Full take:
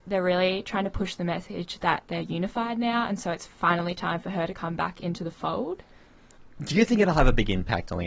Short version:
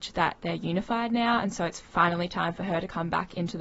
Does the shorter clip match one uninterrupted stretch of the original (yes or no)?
yes